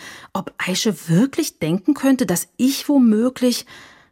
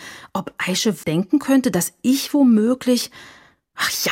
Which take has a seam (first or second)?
second